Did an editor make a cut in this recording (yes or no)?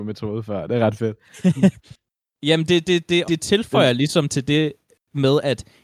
yes